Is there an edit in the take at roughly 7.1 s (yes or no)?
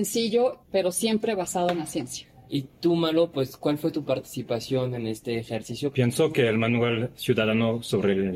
yes